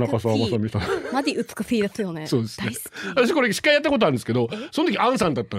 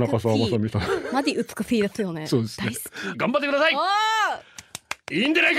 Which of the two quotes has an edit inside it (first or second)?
second